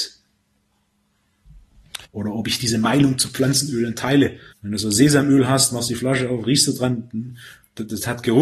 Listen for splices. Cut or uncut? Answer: cut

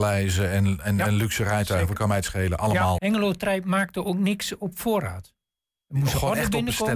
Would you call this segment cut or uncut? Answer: cut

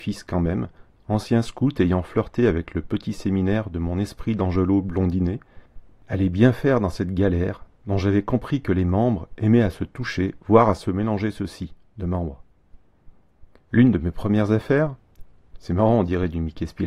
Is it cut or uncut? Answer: cut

